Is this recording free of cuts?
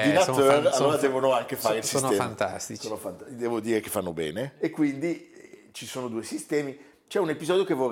yes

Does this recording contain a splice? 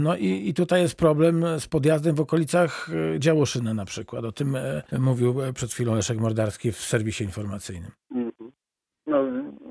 yes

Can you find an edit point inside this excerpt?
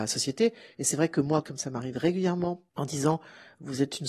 yes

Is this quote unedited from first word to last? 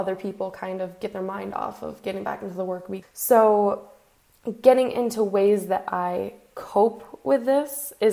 no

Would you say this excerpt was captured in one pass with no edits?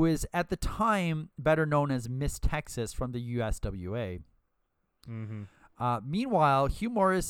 yes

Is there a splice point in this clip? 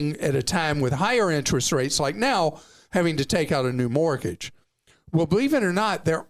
no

